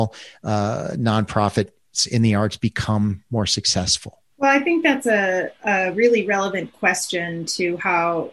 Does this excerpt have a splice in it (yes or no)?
yes